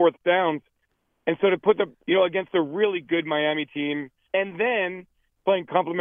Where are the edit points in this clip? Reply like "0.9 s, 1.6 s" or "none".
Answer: 2.0 s, 4.2 s